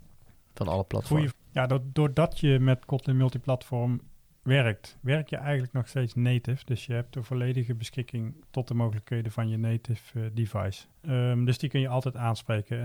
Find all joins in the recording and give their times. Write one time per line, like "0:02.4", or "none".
0:01.3
0:10.9